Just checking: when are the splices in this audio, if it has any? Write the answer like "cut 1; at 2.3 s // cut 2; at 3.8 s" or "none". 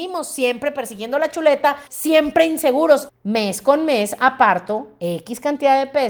cut 1; at 1.9 s // cut 2; at 3.1 s